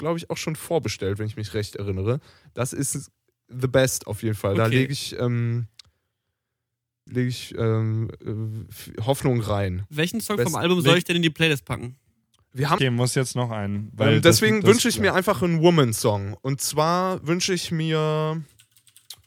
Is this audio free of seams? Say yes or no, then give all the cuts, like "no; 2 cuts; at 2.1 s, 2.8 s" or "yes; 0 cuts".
no; 2 cuts; at 7.1 s, 12.8 s